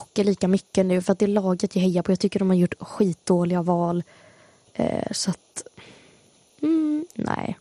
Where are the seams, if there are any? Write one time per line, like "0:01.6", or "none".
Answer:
none